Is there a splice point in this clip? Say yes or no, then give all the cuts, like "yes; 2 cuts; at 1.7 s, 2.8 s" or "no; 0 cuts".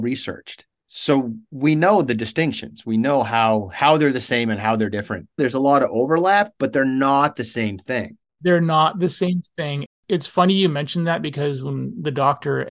yes; 1 cut; at 5.4 s